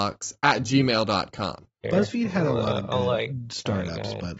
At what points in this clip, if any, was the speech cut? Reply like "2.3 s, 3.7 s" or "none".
1.8 s